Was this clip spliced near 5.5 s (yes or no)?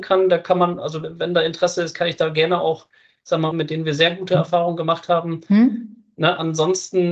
no